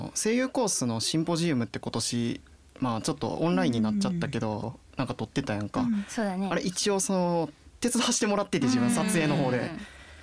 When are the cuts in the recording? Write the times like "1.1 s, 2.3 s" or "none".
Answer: 4.6 s